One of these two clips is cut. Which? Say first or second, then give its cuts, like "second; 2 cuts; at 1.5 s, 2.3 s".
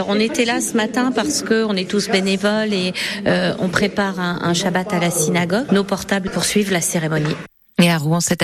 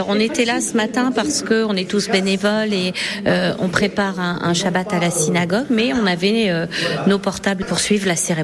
first; 1 cut; at 5.7 s